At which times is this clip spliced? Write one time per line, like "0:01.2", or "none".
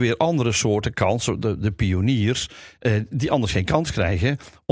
none